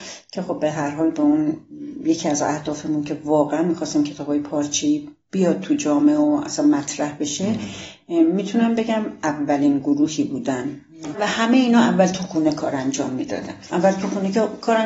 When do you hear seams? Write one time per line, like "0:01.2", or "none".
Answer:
0:11.1